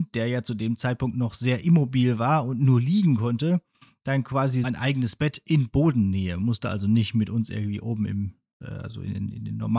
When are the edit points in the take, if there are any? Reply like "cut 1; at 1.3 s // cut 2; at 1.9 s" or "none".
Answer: cut 1; at 4.6 s